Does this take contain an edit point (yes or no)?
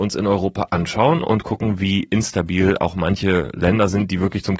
no